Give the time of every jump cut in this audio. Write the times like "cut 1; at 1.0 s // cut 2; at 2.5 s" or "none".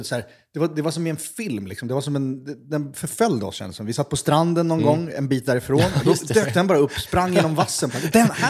none